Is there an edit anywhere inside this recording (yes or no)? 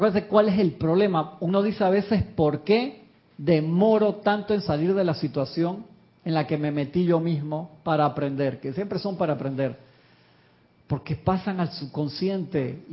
no